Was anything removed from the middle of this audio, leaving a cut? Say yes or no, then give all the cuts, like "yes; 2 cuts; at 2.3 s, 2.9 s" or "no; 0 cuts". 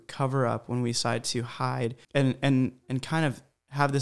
yes; 1 cut; at 2.0 s